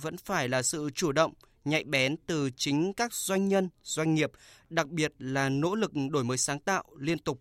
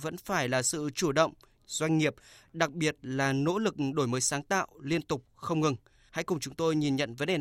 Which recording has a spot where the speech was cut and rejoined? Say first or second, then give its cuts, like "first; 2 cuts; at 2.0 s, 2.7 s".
second; 1 cut; at 1.6 s